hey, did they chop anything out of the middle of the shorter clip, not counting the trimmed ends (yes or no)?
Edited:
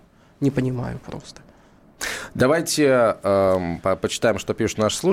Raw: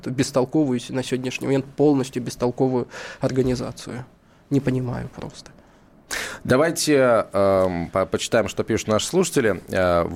no